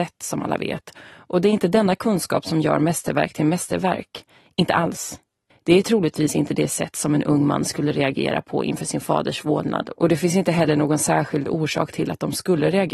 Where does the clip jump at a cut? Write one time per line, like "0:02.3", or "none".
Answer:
0:05.5